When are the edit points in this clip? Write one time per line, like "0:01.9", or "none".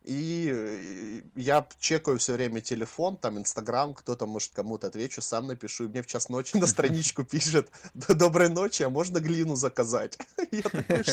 0:04.5
0:06.5